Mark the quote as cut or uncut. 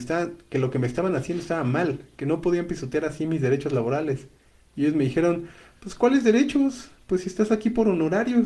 uncut